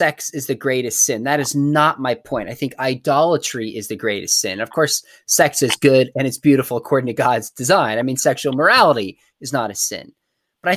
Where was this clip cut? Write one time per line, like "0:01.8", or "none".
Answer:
none